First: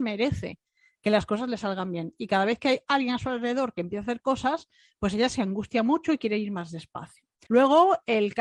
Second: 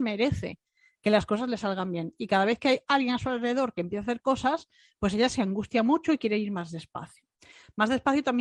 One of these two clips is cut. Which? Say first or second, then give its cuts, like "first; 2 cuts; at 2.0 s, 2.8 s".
first; 1 cut; at 7.5 s